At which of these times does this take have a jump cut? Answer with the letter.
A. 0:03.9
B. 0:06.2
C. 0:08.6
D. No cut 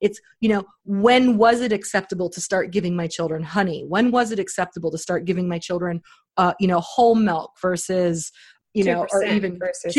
D